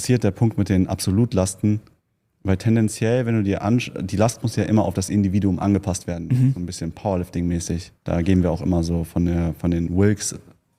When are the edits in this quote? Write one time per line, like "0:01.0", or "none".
0:08.0